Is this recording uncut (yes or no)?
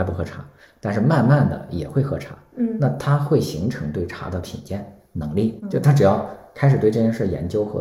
yes